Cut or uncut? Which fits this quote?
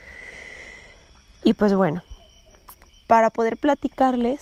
cut